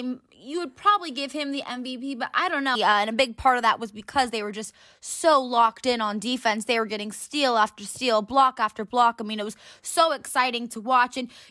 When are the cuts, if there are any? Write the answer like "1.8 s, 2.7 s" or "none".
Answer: 2.7 s